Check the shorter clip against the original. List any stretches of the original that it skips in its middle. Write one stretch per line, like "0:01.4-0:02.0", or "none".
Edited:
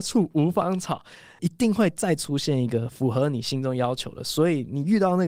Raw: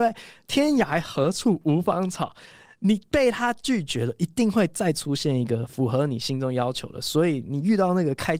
0:02.7-0:04.2